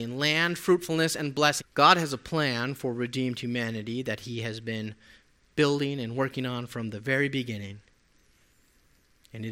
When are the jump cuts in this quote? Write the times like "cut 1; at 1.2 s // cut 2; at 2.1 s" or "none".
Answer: cut 1; at 1.6 s